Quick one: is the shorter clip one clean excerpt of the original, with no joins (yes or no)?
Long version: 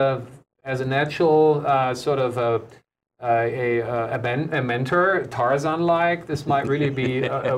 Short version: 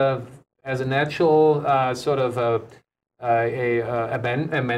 yes